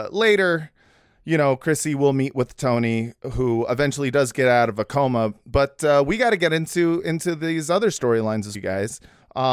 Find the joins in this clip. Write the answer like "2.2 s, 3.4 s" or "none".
8.5 s